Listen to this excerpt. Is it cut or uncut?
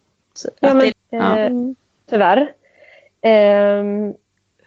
cut